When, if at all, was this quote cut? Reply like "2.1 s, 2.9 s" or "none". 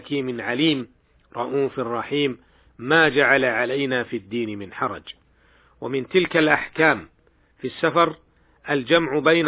none